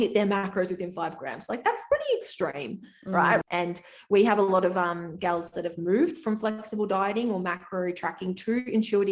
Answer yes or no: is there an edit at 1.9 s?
no